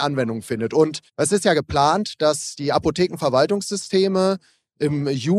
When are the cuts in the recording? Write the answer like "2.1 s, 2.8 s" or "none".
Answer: 1.1 s